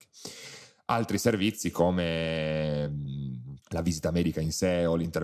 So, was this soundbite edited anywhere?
yes; 1 cut; at 3.6 s

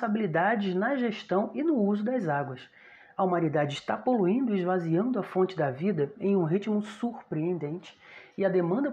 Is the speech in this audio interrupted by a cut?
no; 0 cuts

